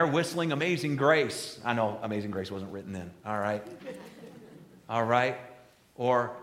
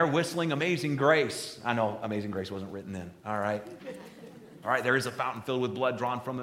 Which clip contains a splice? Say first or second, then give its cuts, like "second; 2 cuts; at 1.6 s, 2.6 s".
second; 1 cut; at 4.6 s